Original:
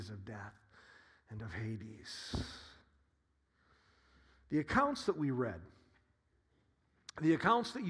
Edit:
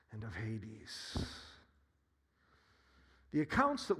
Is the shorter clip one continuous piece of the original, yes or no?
yes